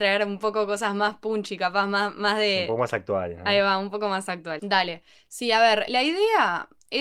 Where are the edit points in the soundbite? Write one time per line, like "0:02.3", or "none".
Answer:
0:04.6
0:05.9